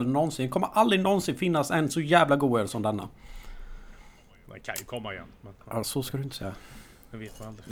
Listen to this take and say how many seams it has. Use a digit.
0